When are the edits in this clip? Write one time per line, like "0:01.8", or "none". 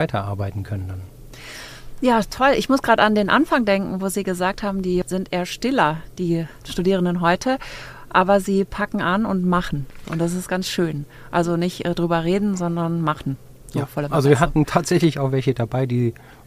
0:10.0